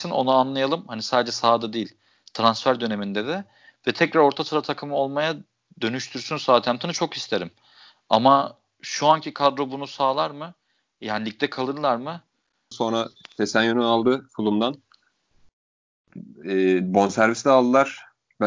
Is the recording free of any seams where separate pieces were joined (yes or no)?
no